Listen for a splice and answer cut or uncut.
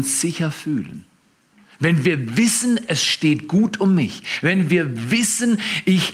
uncut